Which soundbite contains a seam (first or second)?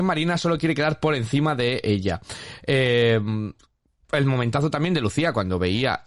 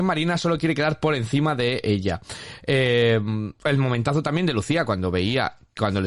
second